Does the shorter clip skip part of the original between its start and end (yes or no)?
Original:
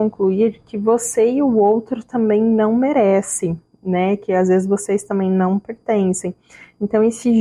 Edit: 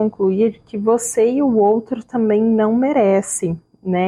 no